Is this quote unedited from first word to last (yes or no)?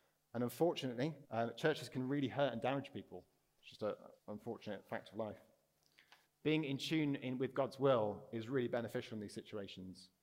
no